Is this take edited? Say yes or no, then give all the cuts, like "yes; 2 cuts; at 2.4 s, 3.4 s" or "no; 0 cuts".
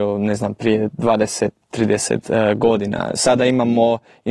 no; 0 cuts